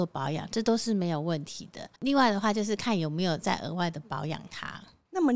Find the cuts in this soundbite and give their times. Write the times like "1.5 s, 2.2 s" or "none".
2.0 s